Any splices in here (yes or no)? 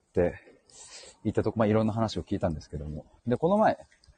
yes